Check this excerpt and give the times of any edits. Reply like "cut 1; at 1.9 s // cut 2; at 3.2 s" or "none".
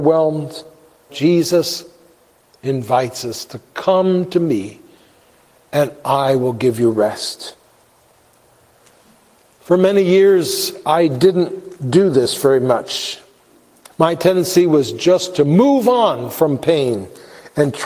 cut 1; at 1.1 s